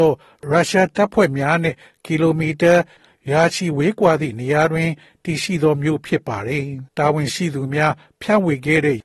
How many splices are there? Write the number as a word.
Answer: one